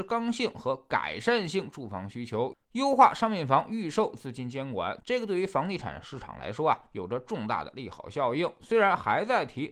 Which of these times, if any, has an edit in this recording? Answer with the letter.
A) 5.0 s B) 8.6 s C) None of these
A